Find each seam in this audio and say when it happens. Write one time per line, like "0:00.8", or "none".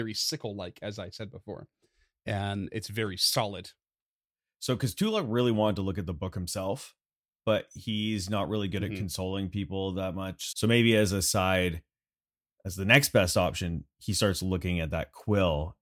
0:10.5